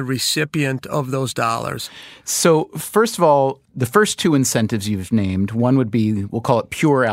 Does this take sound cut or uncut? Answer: uncut